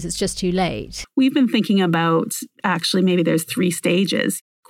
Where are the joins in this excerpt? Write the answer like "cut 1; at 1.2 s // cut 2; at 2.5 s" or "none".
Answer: none